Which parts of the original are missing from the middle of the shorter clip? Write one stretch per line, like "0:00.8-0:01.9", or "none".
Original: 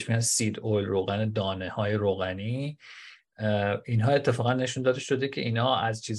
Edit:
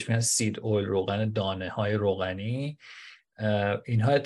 none